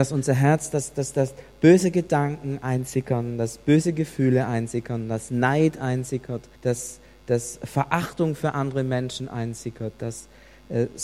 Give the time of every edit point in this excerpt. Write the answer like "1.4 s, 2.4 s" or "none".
6.6 s